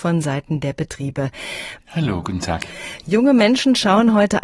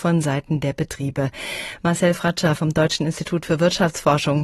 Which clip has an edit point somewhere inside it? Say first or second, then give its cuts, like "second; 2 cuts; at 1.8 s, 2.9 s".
first; 1 cut; at 1.8 s